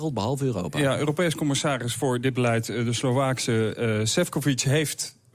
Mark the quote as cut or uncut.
uncut